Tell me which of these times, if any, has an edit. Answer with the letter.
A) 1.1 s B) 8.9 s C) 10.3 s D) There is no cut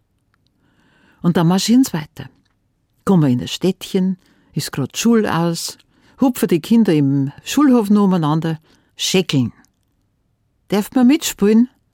B